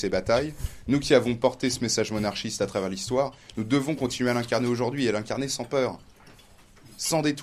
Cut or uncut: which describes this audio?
uncut